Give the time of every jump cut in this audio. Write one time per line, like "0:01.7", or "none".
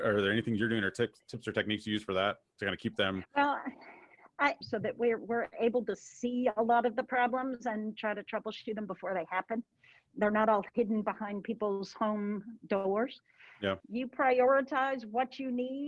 0:04.6
0:13.8